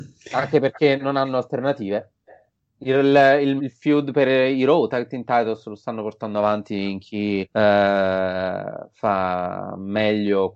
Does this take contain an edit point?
yes; 2 cuts; at 3.6 s, 7.4 s

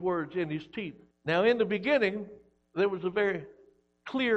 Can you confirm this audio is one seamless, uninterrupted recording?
no; 1 cut; at 1.1 s

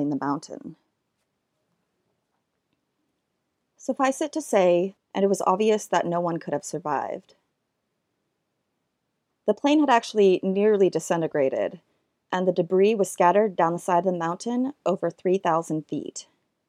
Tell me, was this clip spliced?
yes; 1 cut; at 5.0 s

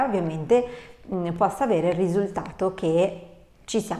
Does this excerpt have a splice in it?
no; 0 cuts

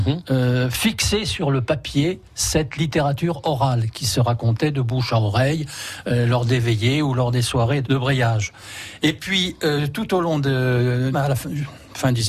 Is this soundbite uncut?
no; 2 cuts; at 7.8 s, 11.1 s

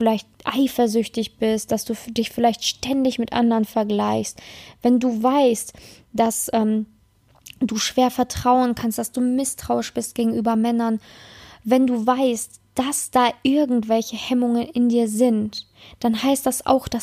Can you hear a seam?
no; 0 cuts

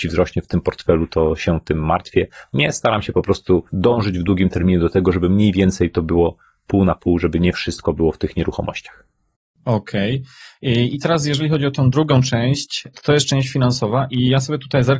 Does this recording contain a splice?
yes; 1 cut; at 3.7 s

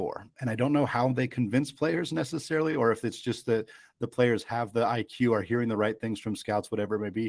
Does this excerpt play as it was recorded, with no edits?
yes; 0 cuts

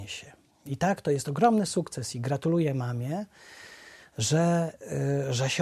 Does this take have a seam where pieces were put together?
no; 0 cuts

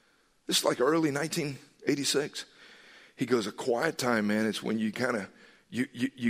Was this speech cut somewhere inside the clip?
no; 0 cuts

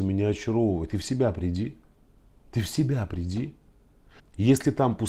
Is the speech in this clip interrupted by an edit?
yes; 1 cut; at 4.2 s

